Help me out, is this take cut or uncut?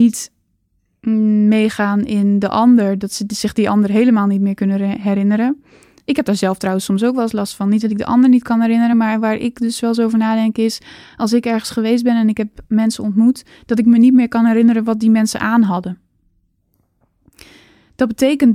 uncut